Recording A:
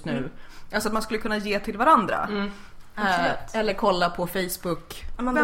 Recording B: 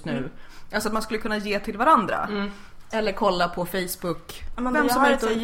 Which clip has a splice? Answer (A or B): B